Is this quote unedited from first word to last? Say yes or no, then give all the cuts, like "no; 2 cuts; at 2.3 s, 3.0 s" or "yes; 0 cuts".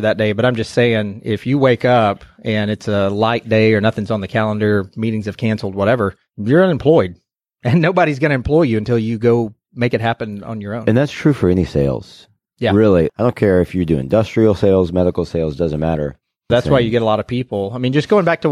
no; 2 cuts; at 13.1 s, 16.5 s